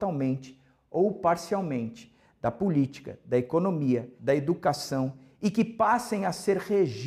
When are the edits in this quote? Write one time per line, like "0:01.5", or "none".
0:04.2